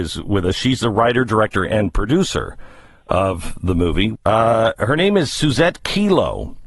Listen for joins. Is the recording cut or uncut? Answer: cut